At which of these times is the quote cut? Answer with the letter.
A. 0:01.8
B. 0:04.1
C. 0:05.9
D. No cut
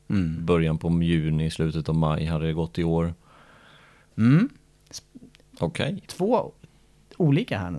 B